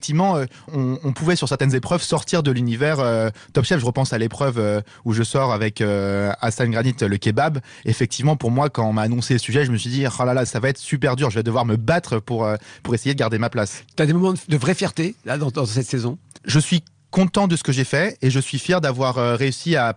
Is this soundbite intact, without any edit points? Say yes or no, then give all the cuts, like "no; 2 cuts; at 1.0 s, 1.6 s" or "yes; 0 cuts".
no; 2 cuts; at 10.5 s, 16.4 s